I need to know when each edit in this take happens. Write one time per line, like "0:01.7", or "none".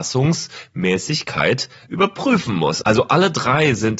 0:02.8

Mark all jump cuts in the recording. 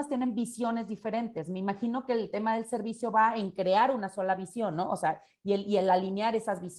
none

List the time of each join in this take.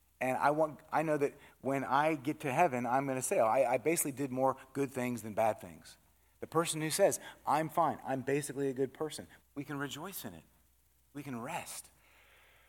0:09.4
0:11.1

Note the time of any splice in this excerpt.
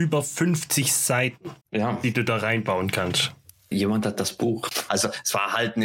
0:01.6
0:03.7
0:04.9

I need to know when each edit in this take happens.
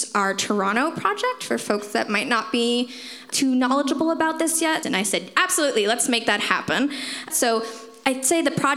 0:04.8
0:07.3

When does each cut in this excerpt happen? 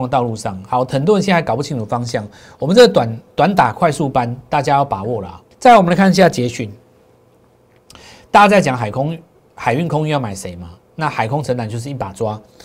0:05.5

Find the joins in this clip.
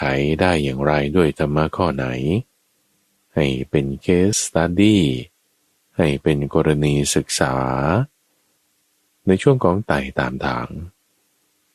0:04.3

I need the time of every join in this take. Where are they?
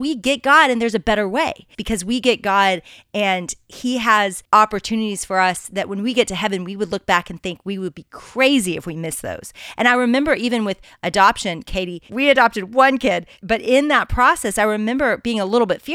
0:01.7

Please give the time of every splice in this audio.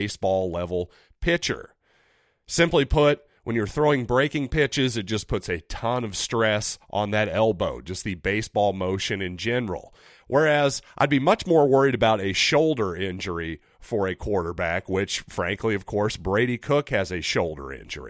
none

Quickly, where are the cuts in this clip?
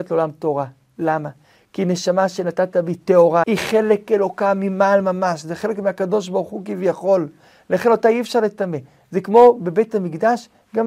0:03.4

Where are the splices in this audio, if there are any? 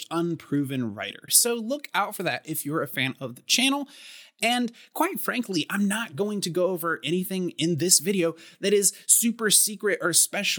0:01.3

